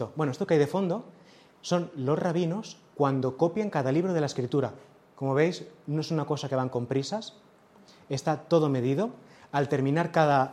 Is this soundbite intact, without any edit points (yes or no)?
yes